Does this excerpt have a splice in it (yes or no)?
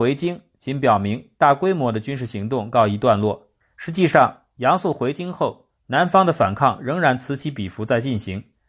yes